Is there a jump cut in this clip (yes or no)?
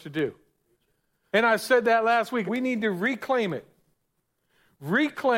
yes